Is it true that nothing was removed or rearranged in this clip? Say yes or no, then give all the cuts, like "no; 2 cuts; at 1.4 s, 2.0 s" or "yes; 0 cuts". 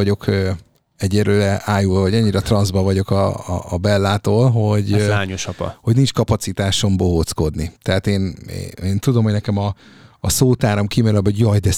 yes; 0 cuts